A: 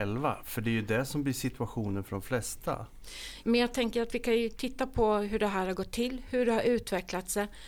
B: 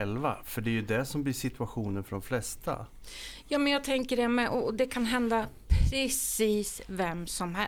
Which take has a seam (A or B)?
A